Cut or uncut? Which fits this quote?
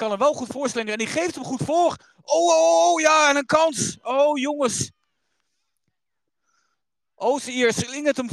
uncut